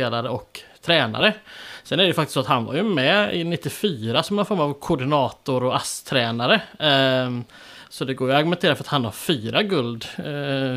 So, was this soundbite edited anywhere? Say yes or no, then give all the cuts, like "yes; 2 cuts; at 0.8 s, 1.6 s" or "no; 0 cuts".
no; 0 cuts